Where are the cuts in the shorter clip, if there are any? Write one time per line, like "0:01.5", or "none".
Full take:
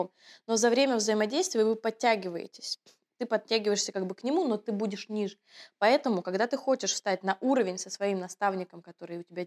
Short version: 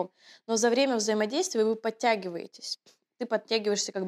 none